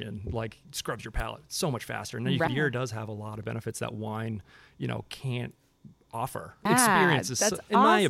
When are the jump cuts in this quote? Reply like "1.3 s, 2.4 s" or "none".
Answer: 2.5 s, 6.7 s

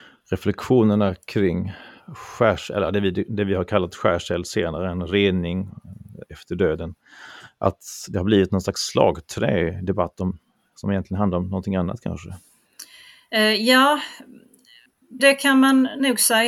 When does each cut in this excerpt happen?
15.2 s

